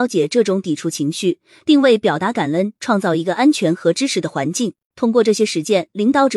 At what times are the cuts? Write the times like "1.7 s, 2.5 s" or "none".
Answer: 4.9 s